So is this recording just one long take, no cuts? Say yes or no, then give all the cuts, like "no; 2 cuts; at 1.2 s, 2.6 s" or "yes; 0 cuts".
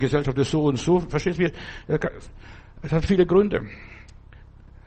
yes; 0 cuts